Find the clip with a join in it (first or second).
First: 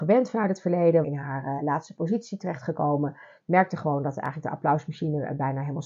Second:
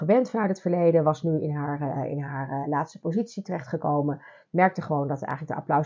first